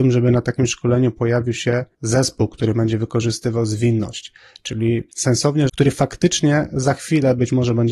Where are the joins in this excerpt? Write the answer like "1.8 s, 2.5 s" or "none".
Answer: 1.9 s, 5.7 s

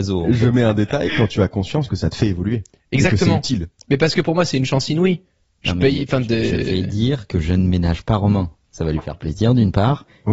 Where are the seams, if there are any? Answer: none

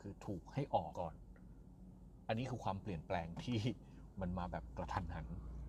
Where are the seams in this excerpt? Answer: 0.9 s

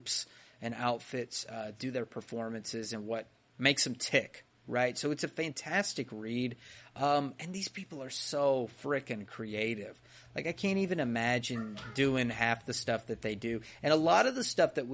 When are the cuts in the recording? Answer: none

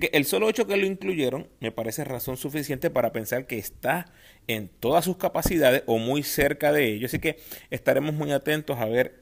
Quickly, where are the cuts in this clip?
none

